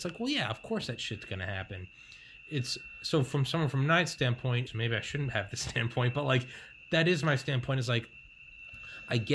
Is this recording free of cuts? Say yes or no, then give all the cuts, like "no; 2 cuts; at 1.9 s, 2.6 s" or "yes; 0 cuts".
no; 1 cut; at 4.7 s